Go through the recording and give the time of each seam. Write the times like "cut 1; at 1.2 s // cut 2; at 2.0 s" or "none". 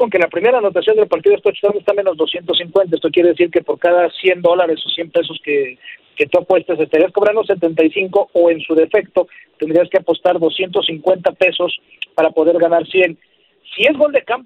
none

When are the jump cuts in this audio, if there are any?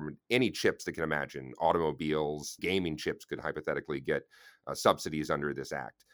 cut 1; at 2.6 s

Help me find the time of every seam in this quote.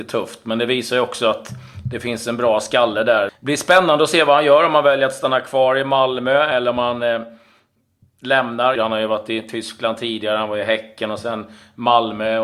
cut 1; at 3.3 s // cut 2; at 8.7 s

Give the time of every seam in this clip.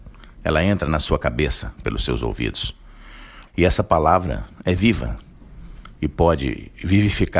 cut 1; at 3.5 s

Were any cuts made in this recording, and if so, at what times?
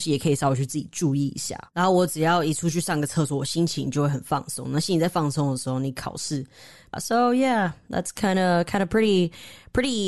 cut 1; at 6.9 s

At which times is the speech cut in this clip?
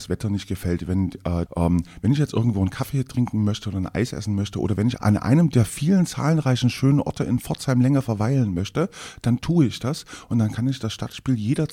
cut 1; at 1.5 s // cut 2; at 5.0 s

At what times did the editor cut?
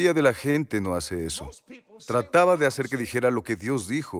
cut 1; at 2.0 s

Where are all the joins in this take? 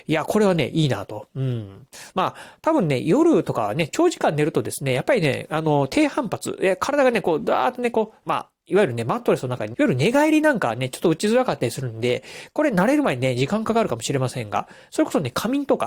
cut 1; at 8.2 s // cut 2; at 9.7 s

